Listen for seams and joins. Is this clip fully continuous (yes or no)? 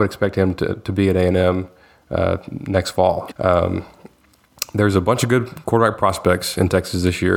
no